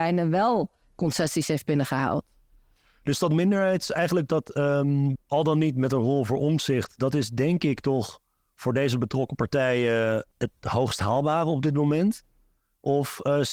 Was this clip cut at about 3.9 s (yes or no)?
no